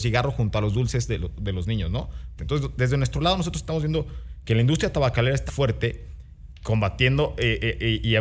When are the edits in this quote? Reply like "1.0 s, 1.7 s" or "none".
2.4 s, 5.5 s

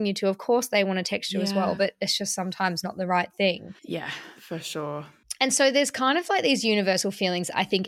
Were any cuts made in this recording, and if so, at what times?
3.8 s

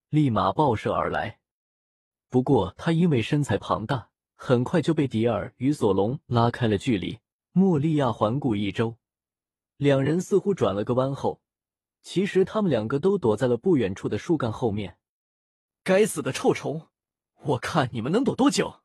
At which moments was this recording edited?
4.2 s, 7.4 s, 11.9 s

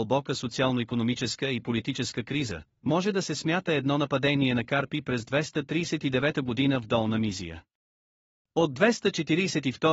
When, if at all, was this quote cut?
2.8 s

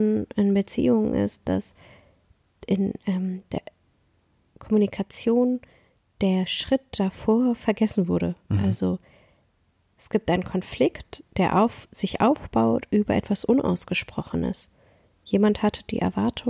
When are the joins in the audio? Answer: none

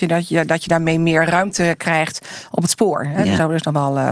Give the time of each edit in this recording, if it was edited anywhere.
none

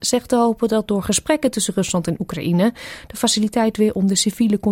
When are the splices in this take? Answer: none

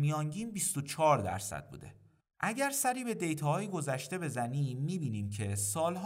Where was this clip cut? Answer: 2.2 s

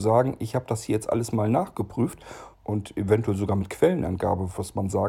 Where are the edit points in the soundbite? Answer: 2.5 s

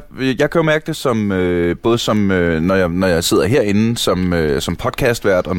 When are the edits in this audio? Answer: none

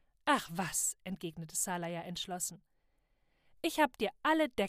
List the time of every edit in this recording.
none

